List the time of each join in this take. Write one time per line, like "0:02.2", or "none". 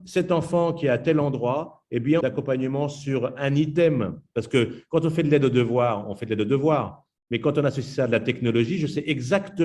0:02.2